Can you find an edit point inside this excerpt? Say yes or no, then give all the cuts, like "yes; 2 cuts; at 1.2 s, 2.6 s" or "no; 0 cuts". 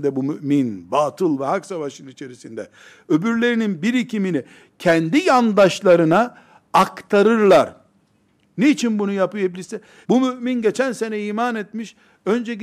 yes; 1 cut; at 10.0 s